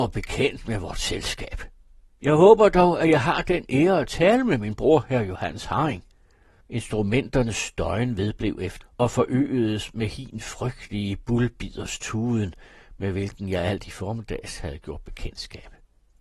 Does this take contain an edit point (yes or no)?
yes